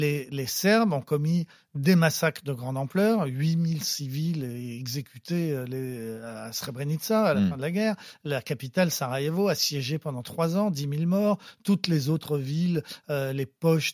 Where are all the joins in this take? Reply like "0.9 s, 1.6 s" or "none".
none